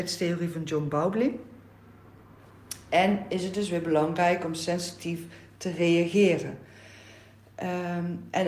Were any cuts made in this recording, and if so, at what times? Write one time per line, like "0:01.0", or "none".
none